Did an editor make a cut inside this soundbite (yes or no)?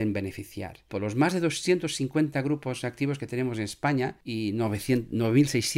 yes